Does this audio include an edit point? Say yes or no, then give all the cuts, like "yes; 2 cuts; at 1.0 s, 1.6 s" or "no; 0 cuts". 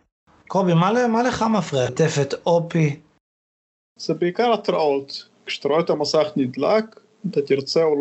yes; 1 cut; at 1.9 s